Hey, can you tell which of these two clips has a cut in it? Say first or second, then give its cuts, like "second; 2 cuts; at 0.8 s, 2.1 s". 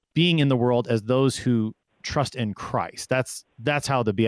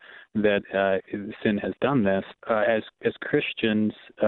second; 1 cut; at 2.3 s